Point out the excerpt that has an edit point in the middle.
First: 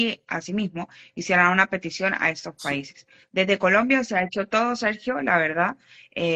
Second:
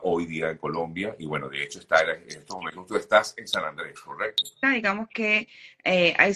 second; 1 cut; at 4.6 s

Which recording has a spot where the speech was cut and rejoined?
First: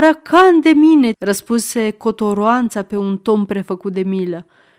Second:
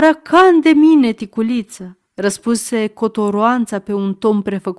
first; 1 cut; at 1.1 s

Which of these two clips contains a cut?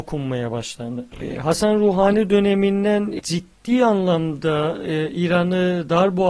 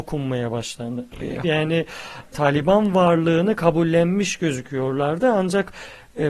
second; 1 cut; at 1.4 s

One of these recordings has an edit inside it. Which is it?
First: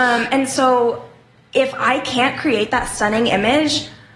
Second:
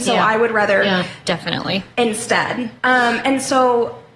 second; 2 cuts; at 1.2 s, 2.8 s

